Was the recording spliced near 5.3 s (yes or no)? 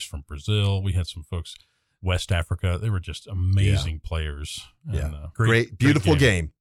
yes